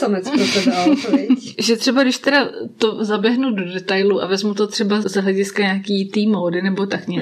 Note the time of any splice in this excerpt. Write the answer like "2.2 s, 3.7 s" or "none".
5.0 s